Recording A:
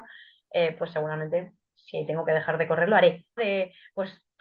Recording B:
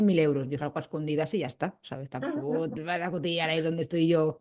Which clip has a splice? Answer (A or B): A